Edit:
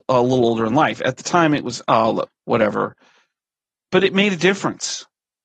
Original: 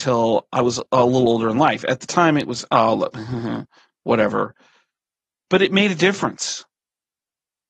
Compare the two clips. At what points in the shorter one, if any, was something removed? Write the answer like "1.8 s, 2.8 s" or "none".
2.3 s